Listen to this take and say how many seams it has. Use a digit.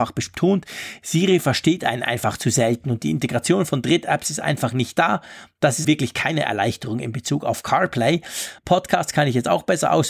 2